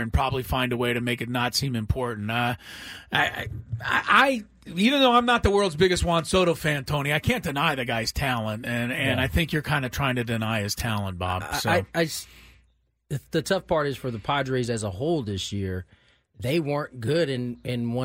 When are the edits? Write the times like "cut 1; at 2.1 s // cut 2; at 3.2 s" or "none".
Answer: none